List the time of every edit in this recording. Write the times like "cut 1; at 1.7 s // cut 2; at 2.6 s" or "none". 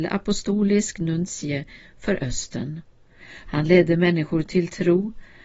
cut 1; at 3.5 s